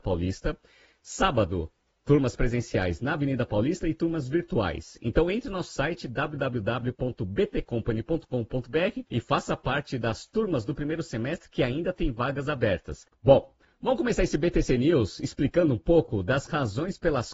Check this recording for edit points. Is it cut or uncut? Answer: cut